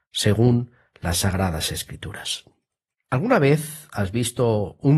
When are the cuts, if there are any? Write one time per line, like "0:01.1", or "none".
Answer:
0:03.1